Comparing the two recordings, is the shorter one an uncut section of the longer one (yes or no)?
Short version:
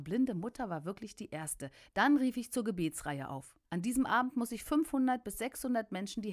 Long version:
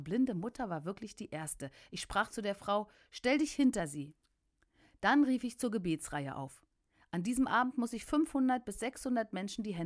no